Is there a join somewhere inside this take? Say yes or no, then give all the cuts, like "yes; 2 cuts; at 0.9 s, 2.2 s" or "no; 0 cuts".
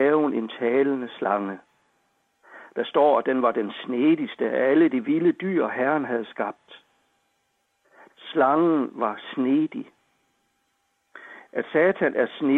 yes; 1 cut; at 8.1 s